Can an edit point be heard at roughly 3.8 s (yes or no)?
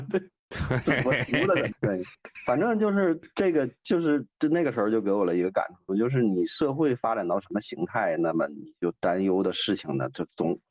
no